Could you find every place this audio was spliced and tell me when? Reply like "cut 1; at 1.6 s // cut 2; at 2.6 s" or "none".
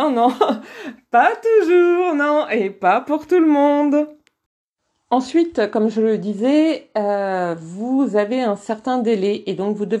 none